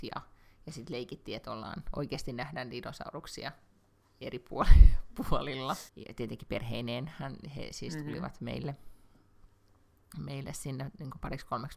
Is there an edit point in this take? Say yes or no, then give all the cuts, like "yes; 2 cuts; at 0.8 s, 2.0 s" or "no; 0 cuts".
yes; 1 cut; at 5.9 s